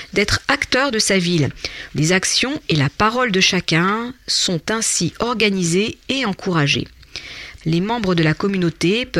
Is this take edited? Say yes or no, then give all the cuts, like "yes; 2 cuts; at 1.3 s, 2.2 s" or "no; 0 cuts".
yes; 2 cuts; at 1.9 s, 7.6 s